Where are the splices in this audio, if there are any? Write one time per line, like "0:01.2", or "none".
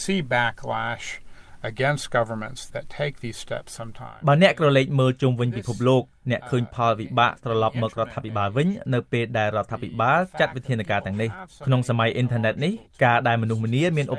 0:02.7